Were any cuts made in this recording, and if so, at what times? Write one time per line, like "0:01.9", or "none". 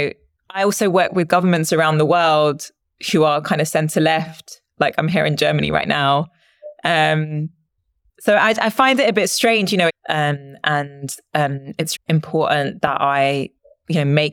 0:09.9
0:11.9